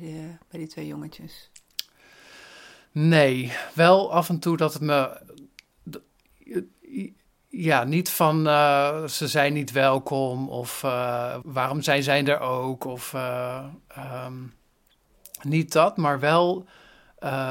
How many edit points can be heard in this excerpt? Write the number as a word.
one